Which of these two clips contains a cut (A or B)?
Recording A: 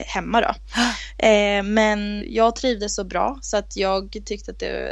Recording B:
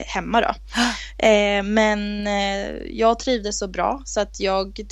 A